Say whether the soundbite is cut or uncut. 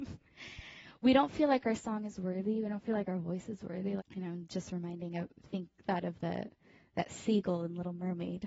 cut